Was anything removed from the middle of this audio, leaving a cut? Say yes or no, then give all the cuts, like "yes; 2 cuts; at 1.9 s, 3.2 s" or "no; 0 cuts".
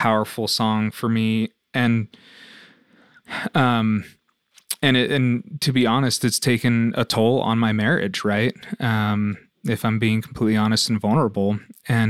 no; 0 cuts